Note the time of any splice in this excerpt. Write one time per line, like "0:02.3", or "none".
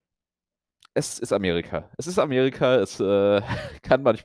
none